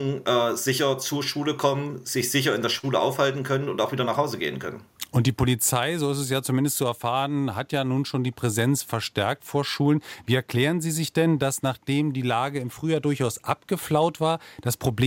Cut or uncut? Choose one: uncut